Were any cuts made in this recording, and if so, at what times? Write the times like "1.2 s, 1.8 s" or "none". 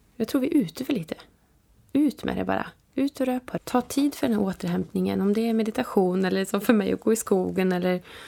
3.6 s